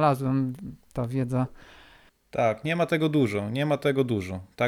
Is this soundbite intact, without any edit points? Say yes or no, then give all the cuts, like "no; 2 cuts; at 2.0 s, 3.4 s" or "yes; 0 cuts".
yes; 0 cuts